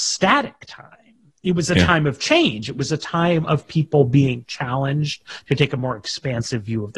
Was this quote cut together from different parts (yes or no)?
no